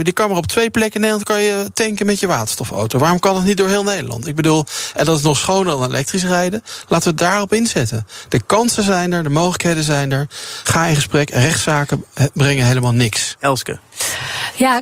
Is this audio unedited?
yes; 0 cuts

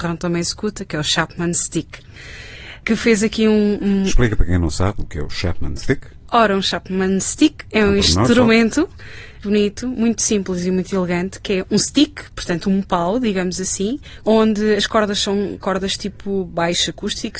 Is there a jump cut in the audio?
yes; 2 cuts; at 9.4 s, 14.2 s

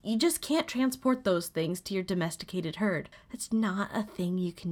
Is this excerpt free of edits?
no; 1 cut; at 3.5 s

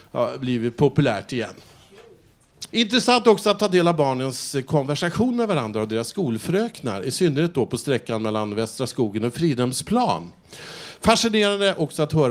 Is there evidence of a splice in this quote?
yes; 1 cut; at 2.7 s

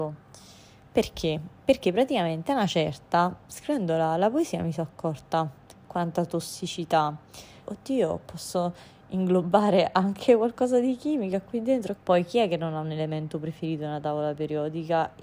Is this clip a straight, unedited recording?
no; 2 cuts; at 7.6 s, 12.0 s

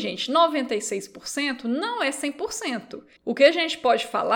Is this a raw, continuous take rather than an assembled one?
no; 1 cut; at 3.2 s

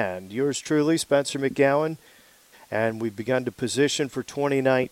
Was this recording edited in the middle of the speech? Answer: yes; 1 cut; at 2.5 s

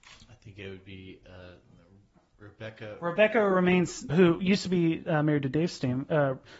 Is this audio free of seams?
no; 1 cut; at 4.1 s

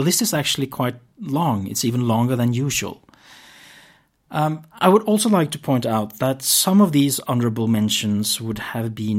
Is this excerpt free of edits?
yes; 0 cuts

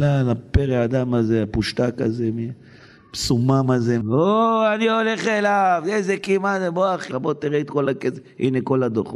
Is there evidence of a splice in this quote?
yes; 2 cuts; at 4.0 s, 7.1 s

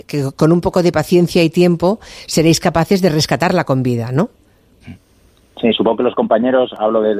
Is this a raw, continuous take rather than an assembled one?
yes; 0 cuts

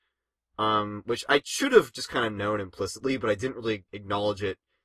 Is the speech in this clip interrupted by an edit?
yes; 1 cut; at 3.9 s

